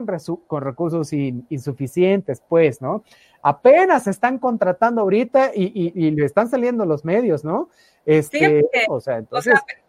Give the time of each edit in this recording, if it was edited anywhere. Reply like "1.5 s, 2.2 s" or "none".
8.9 s